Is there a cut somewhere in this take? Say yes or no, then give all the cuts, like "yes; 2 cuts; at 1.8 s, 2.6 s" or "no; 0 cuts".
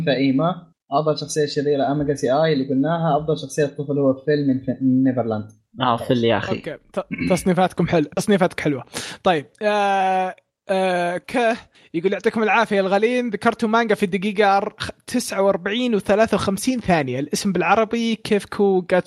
yes; 1 cut; at 11.2 s